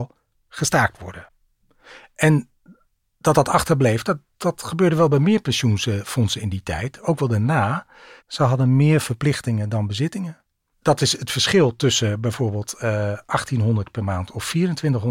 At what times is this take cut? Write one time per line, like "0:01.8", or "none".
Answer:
0:08.2
0:10.7